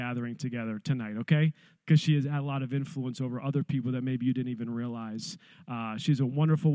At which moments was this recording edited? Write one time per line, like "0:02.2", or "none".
0:01.8